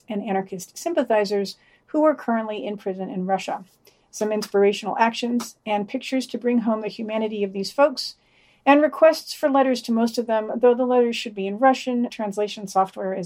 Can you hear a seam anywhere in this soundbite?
yes; 1 cut; at 12.1 s

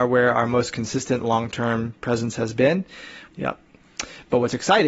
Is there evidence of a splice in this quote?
yes; 1 cut; at 3.3 s

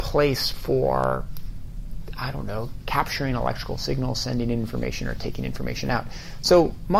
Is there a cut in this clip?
no; 0 cuts

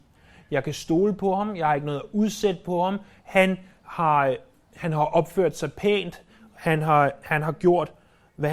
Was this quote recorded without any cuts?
yes; 0 cuts

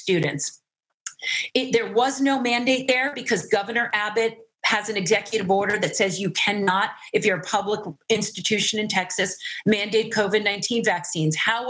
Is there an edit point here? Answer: no; 0 cuts

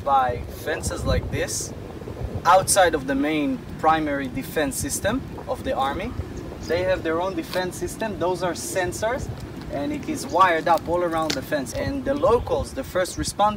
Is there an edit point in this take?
yes; 1 cut; at 11.7 s

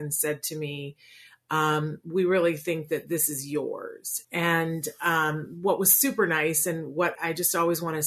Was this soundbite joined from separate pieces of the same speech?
yes; 2 cuts; at 4.2 s, 7.2 s

